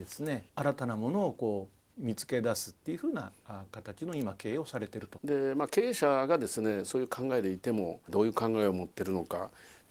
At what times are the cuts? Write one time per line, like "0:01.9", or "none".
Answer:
0:05.2
0:08.1